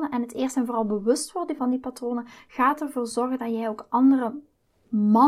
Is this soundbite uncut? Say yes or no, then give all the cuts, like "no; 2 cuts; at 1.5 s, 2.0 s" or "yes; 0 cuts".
no; 1 cut; at 1.6 s